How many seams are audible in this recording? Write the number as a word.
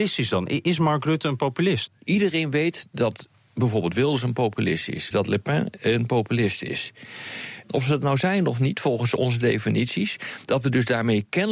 three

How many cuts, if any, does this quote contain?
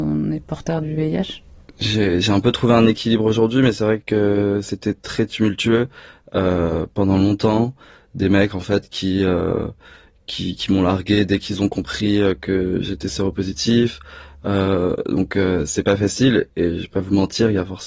zero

